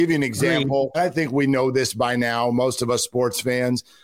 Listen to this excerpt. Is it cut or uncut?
cut